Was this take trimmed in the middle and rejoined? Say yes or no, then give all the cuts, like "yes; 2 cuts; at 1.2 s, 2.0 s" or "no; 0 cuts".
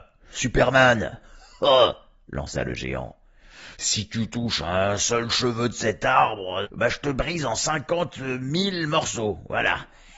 yes; 1 cut; at 6.6 s